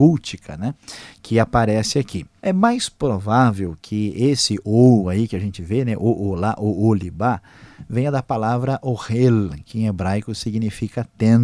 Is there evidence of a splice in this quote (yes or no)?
yes